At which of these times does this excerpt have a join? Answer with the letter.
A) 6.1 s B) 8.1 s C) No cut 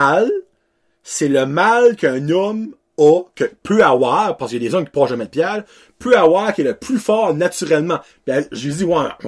B